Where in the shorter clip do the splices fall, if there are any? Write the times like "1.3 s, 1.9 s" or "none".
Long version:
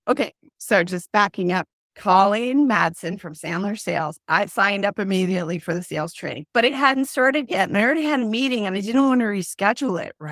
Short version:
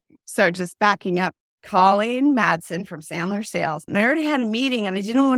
3.9 s